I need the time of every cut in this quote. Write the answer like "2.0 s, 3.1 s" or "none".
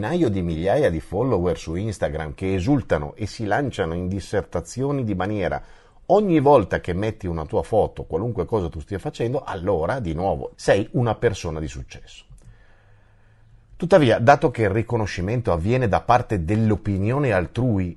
10.5 s